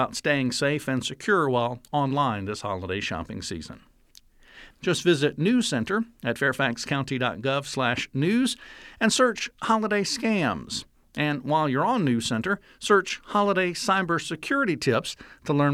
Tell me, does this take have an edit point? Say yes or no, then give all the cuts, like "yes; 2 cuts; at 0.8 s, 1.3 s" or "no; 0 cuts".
yes; 1 cut; at 4.7 s